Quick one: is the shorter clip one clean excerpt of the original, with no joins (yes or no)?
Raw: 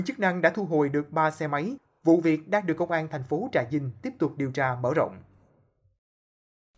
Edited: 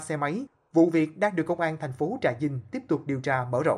yes